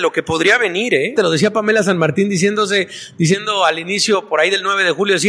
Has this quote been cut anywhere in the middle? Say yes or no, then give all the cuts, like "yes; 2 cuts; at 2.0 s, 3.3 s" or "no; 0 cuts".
yes; 1 cut; at 1.2 s